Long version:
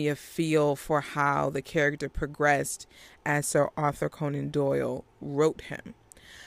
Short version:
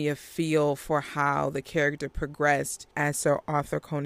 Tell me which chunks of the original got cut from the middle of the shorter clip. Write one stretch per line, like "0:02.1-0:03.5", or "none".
0:02.9-0:03.2